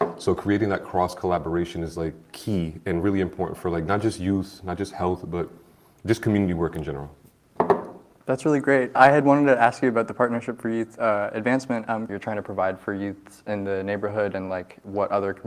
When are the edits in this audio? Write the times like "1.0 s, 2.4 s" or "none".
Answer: 8.9 s, 12.1 s